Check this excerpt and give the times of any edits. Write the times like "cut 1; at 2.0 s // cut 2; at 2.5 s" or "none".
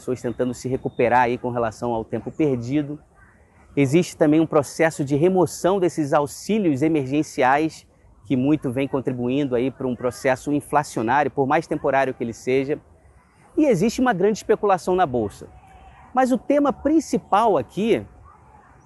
none